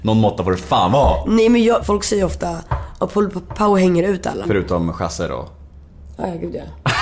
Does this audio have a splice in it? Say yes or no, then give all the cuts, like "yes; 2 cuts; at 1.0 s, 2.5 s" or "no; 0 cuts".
yes; 2 cuts; at 1.8 s, 4.4 s